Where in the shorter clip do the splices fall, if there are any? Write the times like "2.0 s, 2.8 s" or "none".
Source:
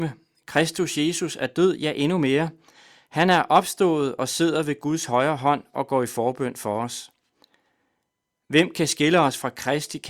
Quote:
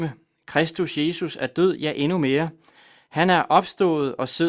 none

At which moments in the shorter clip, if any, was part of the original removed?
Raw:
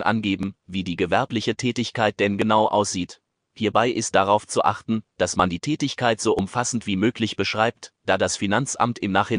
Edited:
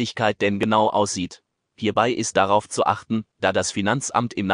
3.3 s

